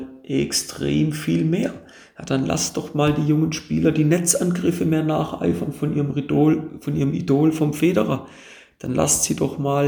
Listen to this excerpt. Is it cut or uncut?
uncut